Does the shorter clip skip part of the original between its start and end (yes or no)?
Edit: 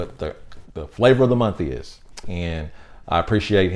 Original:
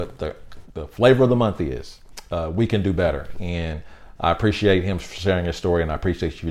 yes